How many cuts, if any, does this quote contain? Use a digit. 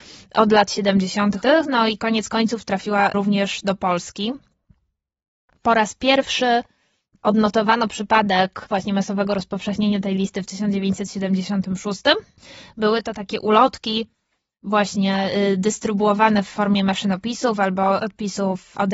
1